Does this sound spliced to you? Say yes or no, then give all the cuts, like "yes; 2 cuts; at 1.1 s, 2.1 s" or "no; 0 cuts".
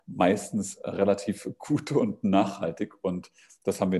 no; 0 cuts